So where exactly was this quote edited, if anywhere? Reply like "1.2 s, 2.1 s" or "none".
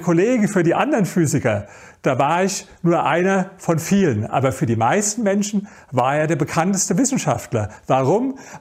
none

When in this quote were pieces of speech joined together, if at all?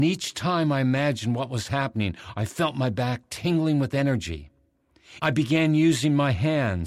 5.2 s

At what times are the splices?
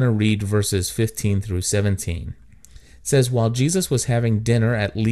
none

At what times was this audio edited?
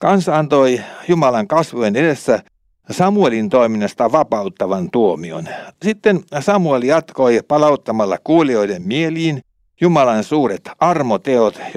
5.7 s

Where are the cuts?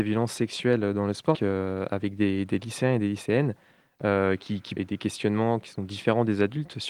1.3 s, 4.8 s

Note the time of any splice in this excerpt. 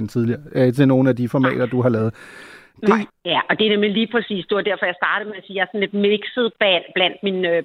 3.1 s

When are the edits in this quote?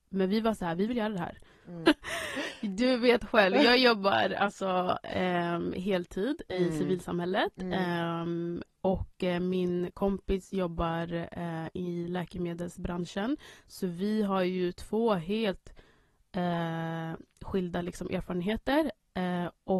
1.8 s

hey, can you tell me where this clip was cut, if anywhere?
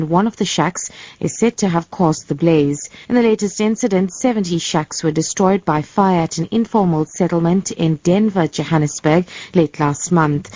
3.0 s

